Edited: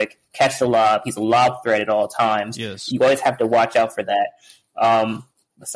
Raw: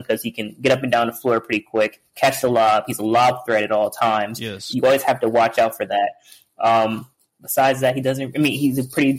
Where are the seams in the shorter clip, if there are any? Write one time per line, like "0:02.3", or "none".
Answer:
none